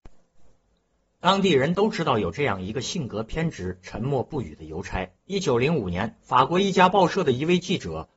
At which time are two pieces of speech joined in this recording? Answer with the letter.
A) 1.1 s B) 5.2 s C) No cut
B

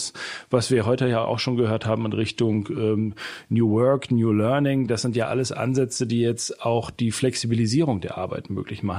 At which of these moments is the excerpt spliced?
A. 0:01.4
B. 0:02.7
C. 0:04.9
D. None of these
D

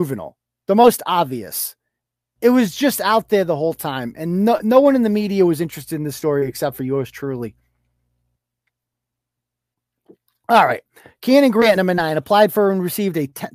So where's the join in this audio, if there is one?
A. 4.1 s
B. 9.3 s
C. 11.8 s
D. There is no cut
D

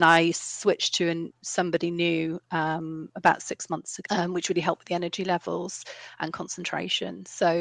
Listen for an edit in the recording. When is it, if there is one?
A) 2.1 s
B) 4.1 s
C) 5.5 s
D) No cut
B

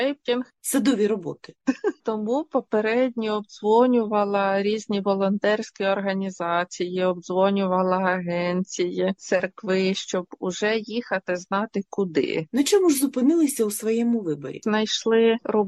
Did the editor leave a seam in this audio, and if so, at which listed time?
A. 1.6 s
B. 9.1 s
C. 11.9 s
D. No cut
A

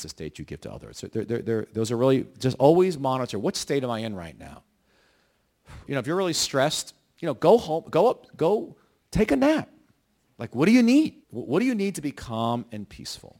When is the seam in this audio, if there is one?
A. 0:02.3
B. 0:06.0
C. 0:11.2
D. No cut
C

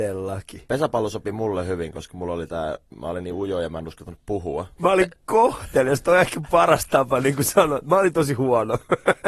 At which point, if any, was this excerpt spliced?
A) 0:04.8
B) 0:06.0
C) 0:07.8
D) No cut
A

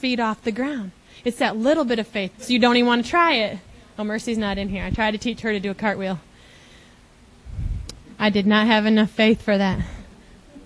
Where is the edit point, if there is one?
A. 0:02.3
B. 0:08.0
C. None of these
A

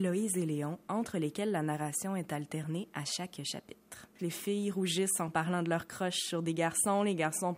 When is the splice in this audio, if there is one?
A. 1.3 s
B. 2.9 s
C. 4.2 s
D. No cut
C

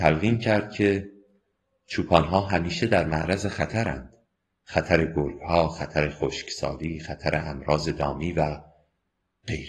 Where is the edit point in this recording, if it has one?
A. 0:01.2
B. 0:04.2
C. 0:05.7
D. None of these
D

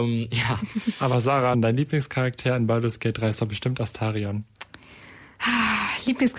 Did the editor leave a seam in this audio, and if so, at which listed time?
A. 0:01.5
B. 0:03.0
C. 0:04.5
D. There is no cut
A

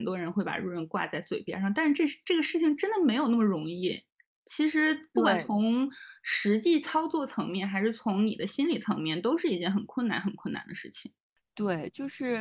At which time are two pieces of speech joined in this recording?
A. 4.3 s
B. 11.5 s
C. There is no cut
C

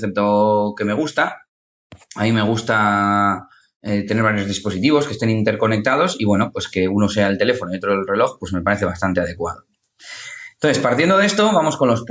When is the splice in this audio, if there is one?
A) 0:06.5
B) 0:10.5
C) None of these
C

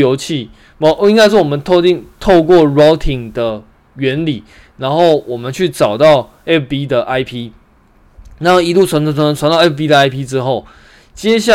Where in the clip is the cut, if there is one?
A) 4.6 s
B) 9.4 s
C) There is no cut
B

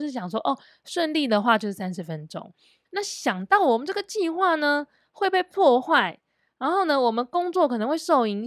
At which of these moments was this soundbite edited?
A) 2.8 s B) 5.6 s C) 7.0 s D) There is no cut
A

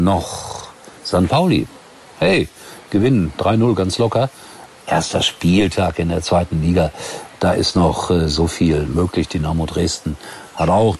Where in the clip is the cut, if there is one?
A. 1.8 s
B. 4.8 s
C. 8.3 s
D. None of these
B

